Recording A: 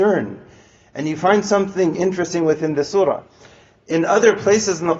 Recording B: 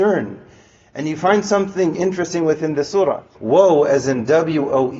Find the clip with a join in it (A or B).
B